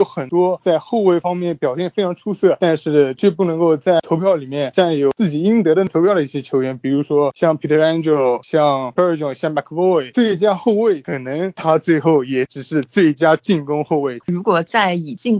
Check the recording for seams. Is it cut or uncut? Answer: cut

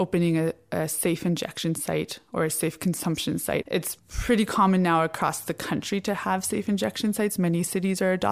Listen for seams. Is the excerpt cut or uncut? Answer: cut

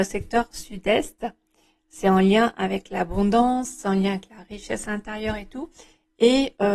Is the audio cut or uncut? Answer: uncut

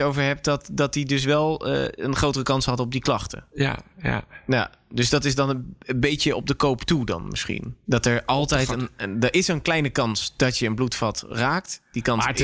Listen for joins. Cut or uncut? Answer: cut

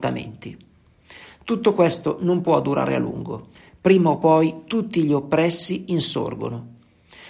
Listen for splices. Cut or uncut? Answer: uncut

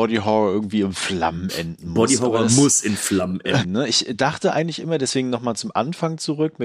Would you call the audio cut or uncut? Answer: cut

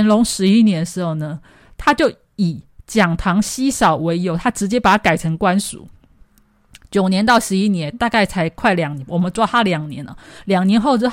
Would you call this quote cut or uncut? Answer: uncut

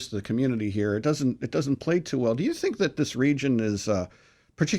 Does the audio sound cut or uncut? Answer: uncut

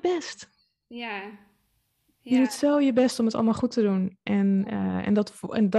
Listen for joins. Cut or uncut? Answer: uncut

